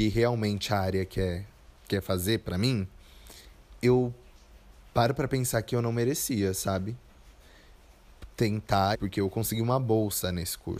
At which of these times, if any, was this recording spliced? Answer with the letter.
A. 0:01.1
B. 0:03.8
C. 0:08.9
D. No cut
C